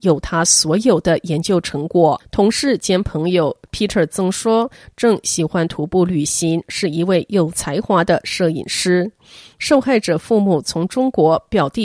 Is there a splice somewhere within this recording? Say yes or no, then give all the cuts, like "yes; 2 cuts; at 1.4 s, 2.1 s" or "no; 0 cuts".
yes; 1 cut; at 2.2 s